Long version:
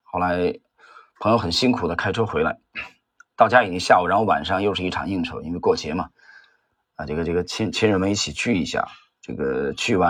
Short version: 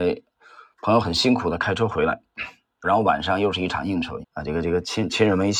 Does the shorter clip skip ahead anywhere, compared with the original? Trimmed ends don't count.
yes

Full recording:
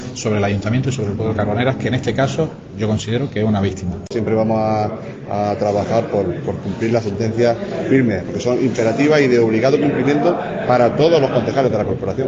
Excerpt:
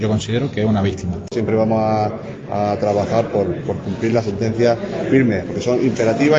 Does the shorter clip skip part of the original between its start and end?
no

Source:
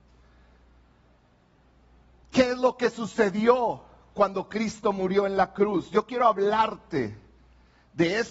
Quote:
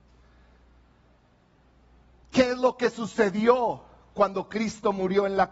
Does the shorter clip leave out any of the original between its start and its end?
no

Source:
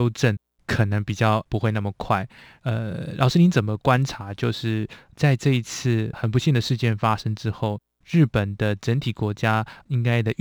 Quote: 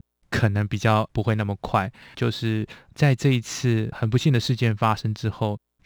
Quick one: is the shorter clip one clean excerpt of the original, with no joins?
no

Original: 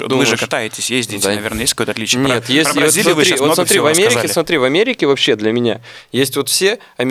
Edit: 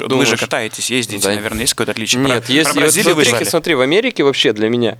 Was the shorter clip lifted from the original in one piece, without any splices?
no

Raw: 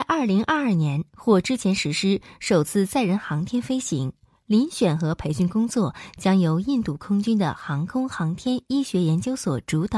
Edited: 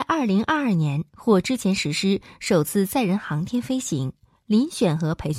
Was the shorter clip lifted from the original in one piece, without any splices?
yes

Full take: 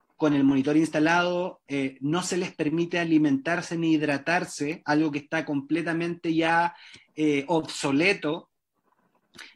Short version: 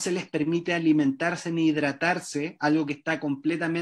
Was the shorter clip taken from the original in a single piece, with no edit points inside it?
yes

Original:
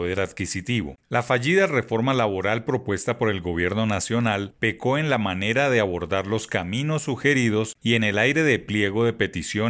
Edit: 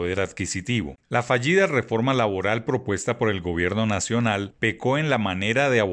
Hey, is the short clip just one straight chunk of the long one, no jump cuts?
yes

